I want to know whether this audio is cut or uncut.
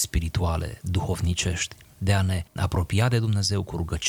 cut